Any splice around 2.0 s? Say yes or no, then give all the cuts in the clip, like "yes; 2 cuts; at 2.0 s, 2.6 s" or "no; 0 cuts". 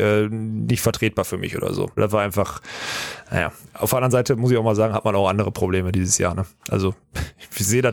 yes; 1 cut; at 2.0 s